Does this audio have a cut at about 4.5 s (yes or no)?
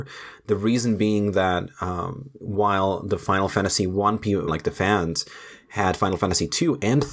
yes